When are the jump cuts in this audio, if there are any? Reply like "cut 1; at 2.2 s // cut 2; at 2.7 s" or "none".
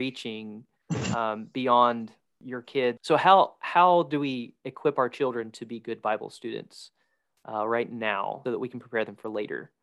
cut 1; at 3.0 s // cut 2; at 8.5 s